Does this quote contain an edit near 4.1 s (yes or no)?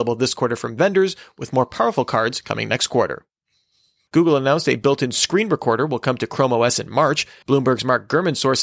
yes